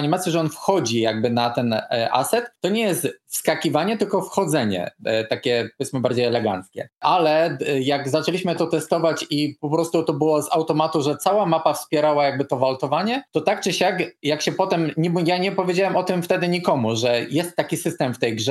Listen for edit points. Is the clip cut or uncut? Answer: uncut